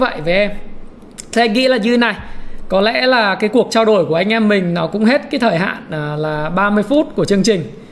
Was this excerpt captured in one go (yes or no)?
yes